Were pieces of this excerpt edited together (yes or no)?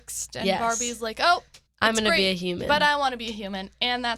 yes